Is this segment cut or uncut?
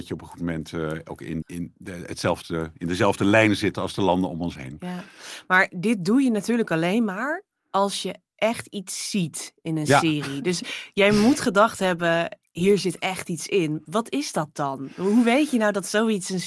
cut